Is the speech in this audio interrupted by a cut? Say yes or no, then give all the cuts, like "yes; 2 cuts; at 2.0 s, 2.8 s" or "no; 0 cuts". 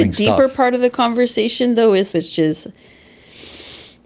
yes; 1 cut; at 2.1 s